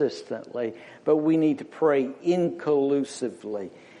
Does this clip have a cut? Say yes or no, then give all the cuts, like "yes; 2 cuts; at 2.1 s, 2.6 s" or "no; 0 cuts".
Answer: no; 0 cuts